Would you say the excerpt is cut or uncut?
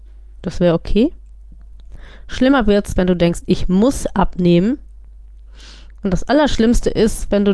uncut